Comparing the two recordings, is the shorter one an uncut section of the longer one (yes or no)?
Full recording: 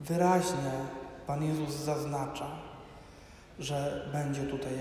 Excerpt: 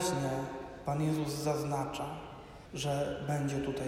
no